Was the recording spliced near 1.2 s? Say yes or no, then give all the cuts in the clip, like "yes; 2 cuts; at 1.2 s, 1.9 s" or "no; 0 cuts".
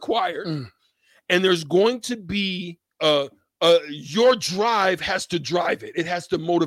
no; 1 cut; at 2.9 s